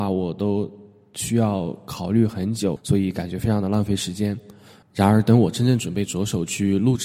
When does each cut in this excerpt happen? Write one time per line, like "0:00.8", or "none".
0:02.8
0:04.8